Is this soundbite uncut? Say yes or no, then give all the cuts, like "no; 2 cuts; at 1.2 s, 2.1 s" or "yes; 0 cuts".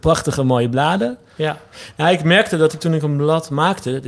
no; 1 cut; at 1.4 s